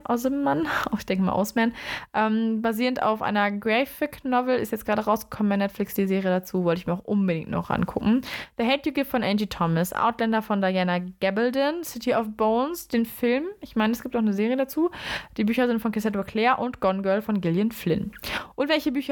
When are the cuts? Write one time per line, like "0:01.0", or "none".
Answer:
none